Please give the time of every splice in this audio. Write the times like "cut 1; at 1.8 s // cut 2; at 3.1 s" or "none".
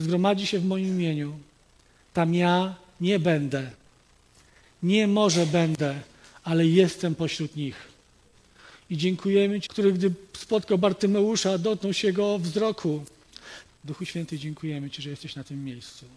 cut 1; at 9.7 s // cut 2; at 13.7 s